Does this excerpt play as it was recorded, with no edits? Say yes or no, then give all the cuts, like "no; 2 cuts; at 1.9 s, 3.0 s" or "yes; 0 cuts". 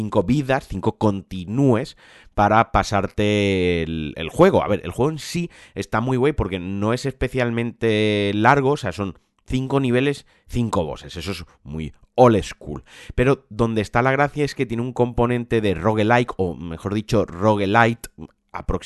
yes; 0 cuts